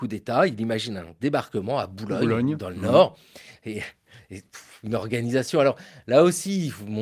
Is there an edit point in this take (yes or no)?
no